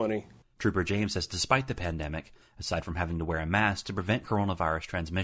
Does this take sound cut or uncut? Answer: cut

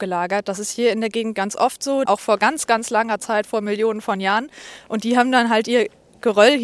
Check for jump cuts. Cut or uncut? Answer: cut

